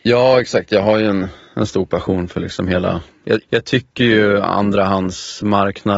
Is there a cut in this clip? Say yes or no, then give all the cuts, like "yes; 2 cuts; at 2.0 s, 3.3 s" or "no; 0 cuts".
yes; 1 cut; at 3.4 s